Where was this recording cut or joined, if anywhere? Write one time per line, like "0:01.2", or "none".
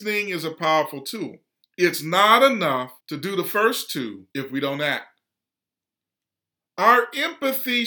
0:01.6
0:03.0
0:04.3